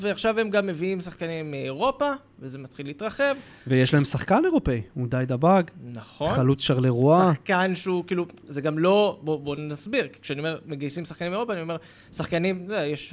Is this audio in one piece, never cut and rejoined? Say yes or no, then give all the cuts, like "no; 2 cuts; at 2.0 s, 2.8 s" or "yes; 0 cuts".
yes; 0 cuts